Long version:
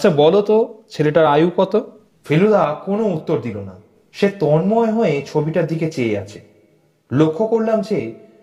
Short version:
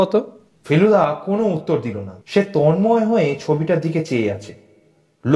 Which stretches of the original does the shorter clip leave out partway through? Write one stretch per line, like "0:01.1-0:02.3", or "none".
0:03.8-0:04.1